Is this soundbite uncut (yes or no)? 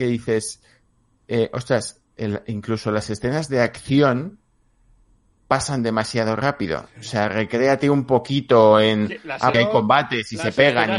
no